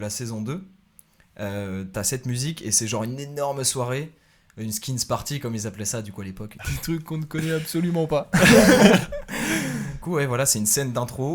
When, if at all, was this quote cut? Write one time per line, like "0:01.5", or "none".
none